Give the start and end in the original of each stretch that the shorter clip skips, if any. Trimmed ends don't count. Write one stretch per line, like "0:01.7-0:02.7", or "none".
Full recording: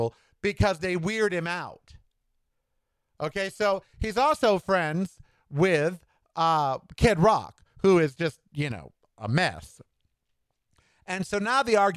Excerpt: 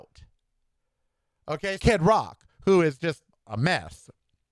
0:03.5-0:07.0
0:08.5-0:09.0